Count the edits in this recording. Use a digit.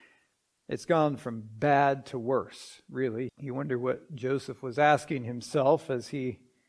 1